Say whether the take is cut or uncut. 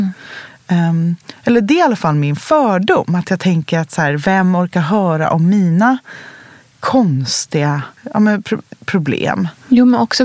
cut